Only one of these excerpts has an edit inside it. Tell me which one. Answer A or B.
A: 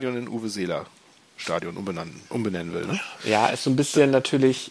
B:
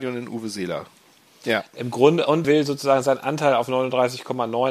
B